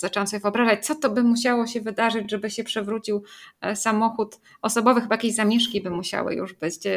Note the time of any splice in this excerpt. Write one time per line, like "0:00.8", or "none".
none